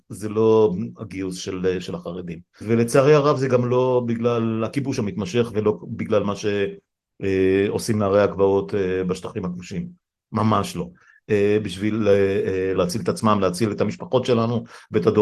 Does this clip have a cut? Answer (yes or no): yes